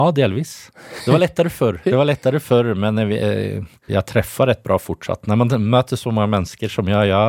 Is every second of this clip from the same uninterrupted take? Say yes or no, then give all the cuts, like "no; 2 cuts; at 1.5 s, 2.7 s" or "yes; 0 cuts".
no; 2 cuts; at 1.8 s, 3.9 s